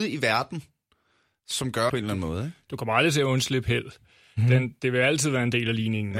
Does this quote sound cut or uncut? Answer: cut